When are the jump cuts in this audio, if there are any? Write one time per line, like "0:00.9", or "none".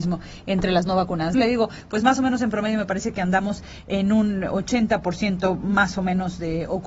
0:01.3